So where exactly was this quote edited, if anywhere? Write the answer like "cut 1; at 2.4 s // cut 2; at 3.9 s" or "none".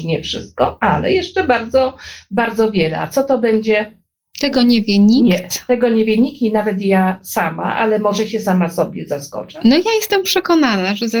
none